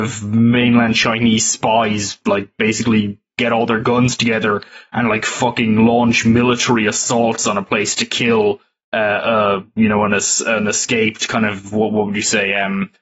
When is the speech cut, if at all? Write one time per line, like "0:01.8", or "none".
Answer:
none